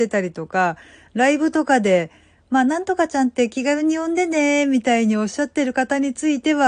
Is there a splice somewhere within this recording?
no; 0 cuts

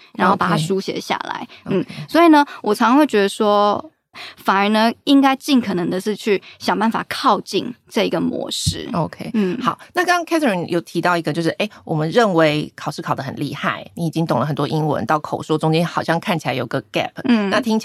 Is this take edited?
yes; 1 cut; at 4.1 s

